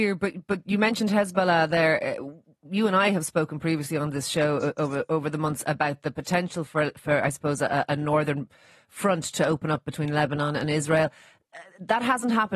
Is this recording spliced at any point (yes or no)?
no